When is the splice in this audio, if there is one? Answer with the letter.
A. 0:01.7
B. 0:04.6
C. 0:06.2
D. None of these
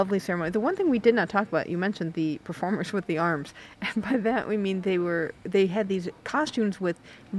C